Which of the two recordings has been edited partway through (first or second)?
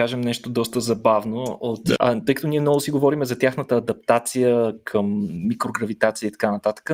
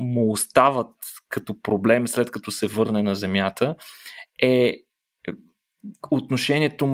first